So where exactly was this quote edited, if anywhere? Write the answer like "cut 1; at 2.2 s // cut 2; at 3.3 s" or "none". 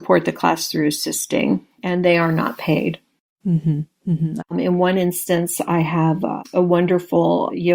cut 1; at 4.4 s